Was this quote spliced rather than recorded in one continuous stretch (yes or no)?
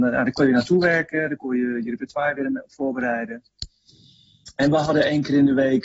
no